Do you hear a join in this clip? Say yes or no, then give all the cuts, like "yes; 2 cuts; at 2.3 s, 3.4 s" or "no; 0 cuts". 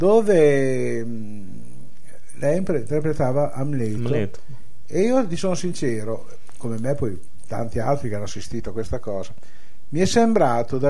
no; 0 cuts